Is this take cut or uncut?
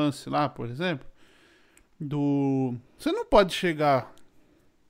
cut